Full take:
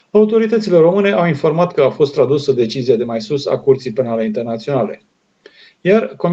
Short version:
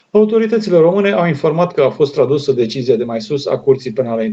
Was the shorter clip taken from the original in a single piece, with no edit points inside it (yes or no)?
yes